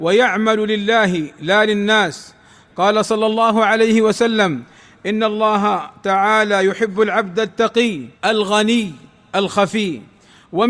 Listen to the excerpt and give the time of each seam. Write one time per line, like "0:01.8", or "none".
0:08.2